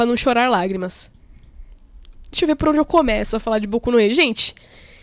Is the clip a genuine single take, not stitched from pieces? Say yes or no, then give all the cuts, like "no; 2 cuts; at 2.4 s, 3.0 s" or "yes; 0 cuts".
yes; 0 cuts